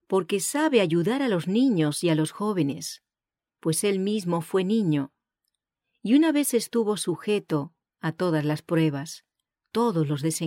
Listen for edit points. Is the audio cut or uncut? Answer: uncut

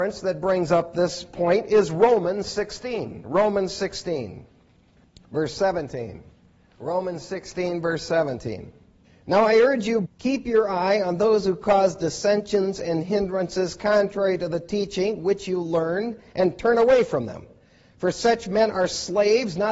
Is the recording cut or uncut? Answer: cut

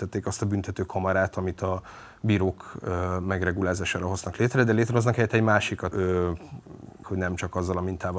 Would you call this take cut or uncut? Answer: cut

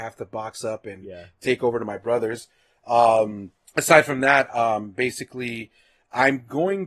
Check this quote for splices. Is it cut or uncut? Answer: uncut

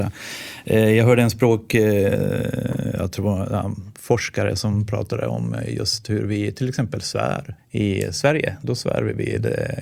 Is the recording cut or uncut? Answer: cut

